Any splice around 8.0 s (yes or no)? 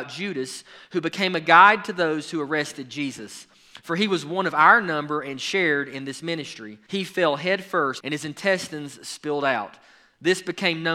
yes